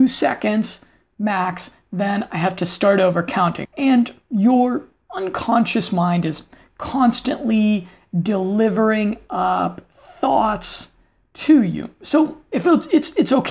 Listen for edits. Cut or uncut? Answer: cut